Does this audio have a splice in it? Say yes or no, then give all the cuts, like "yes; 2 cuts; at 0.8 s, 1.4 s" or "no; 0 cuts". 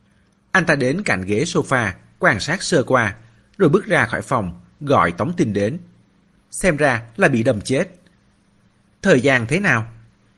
yes; 1 cut; at 6.4 s